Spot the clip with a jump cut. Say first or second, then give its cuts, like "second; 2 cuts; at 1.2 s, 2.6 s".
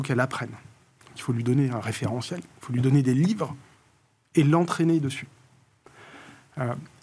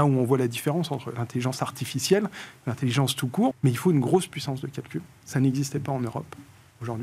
second; 1 cut; at 3.5 s